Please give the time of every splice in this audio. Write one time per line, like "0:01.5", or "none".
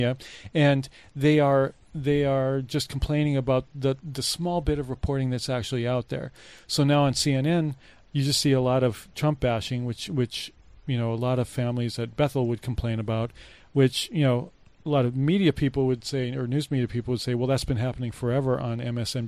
0:08.0